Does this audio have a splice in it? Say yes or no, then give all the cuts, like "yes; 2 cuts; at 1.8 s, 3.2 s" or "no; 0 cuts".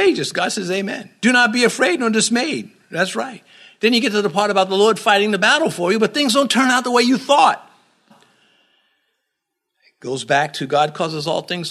yes; 1 cut; at 8.1 s